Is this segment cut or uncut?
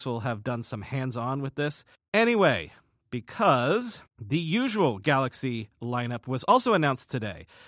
cut